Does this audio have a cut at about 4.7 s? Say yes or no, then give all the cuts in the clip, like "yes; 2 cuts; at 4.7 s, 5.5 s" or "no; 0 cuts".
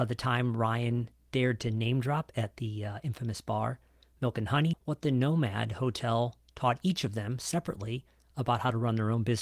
yes; 1 cut; at 4.7 s